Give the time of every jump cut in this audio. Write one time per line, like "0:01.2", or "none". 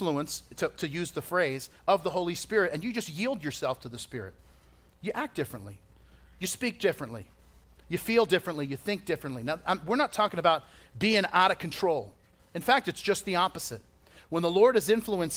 none